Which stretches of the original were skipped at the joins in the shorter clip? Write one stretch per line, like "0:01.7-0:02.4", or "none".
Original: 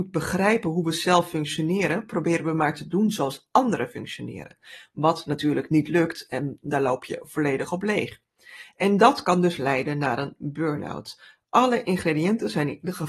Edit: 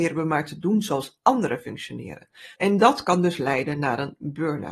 0:04.8-0:08.7